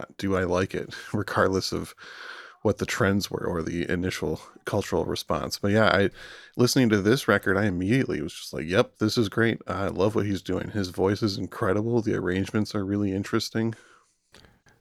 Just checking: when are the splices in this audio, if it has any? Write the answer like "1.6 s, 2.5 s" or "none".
none